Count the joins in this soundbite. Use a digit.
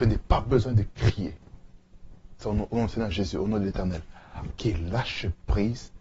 2